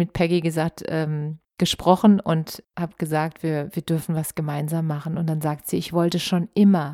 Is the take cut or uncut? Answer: uncut